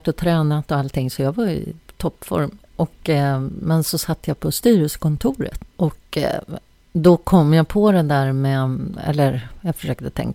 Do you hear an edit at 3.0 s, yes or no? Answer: no